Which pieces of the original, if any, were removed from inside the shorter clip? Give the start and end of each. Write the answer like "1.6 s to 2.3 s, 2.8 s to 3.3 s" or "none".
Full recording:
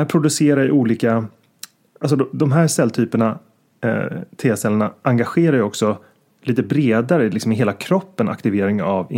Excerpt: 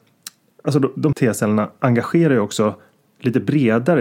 2.5 s to 4.4 s